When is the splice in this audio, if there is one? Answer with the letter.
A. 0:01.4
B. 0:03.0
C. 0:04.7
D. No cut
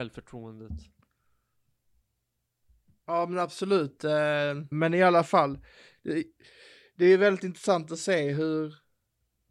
C